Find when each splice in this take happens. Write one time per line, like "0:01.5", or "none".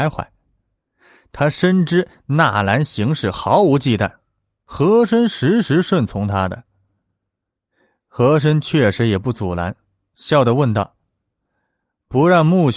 none